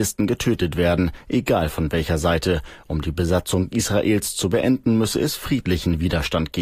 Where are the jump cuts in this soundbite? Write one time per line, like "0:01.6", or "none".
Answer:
none